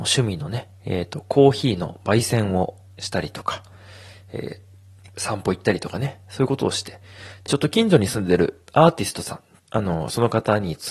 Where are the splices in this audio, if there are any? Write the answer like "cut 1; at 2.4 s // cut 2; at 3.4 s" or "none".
cut 1; at 7.5 s // cut 2; at 9.6 s